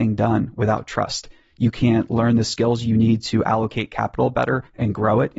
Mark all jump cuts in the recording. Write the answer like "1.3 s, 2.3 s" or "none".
1.5 s